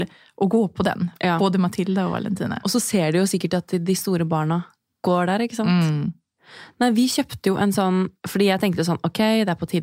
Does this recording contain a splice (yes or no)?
no